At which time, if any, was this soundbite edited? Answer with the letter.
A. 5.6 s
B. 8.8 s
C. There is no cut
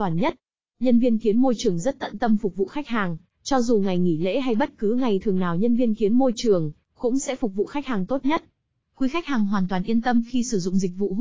B